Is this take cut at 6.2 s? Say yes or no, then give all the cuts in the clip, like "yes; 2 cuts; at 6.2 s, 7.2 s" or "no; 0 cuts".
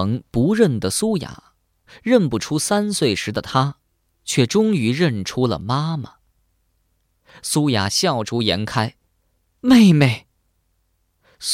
no; 1 cut; at 9.6 s